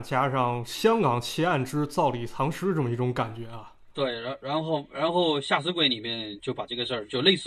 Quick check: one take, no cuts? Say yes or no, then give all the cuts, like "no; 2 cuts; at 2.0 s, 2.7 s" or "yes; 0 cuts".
yes; 0 cuts